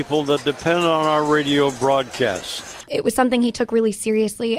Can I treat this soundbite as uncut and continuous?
no; 1 cut; at 2.8 s

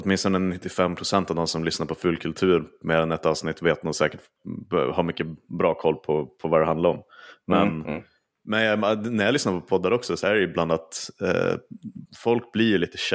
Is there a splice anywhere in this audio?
yes; 1 cut; at 12.1 s

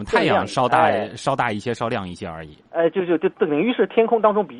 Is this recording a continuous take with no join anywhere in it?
yes; 0 cuts

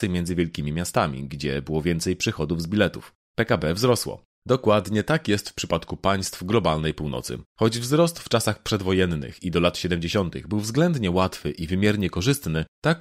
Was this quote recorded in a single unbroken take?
no; 1 cut; at 4.4 s

